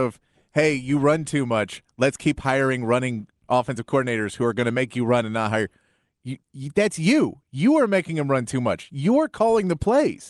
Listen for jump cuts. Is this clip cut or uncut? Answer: uncut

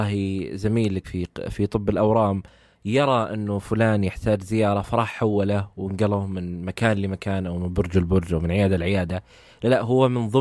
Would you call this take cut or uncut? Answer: cut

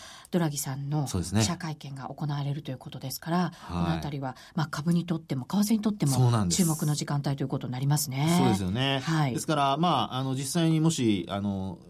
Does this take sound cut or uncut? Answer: uncut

